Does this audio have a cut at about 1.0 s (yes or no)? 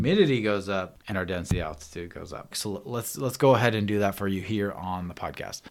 yes